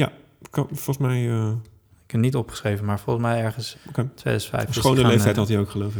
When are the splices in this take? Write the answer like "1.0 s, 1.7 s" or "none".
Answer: 3.7 s